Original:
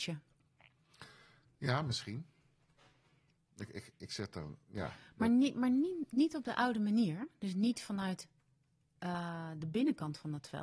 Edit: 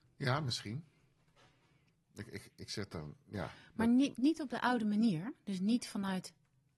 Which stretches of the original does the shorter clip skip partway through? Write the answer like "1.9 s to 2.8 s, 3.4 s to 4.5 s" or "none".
5.5 s to 6.1 s